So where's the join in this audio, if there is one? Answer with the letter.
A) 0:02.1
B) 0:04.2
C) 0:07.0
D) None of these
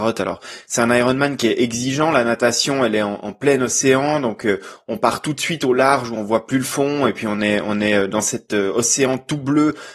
D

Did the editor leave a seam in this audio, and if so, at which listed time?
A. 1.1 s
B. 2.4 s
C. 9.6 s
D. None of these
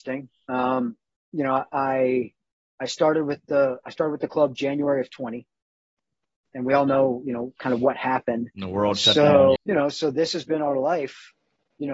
C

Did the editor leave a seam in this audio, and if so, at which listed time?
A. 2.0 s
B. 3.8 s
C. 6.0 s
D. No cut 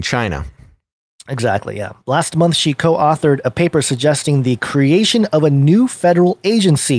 D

